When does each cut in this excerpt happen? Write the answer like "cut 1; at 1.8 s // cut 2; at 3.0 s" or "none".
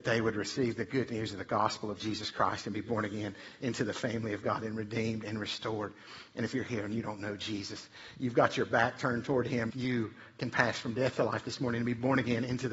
cut 1; at 9.7 s